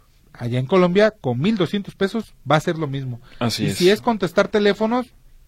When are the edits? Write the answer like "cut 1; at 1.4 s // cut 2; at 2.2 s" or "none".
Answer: none